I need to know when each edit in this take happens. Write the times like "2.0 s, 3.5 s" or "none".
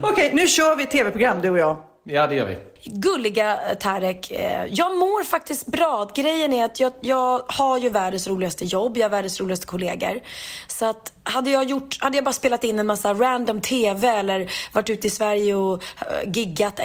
none